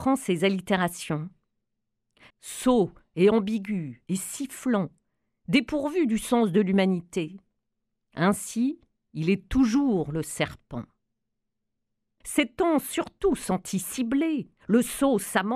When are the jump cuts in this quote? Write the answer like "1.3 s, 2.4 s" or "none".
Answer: 2.3 s, 12.2 s